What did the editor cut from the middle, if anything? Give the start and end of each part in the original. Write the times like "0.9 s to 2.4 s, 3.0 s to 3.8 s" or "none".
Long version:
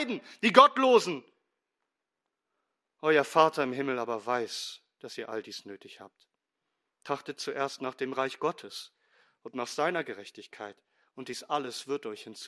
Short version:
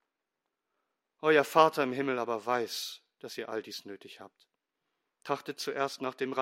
none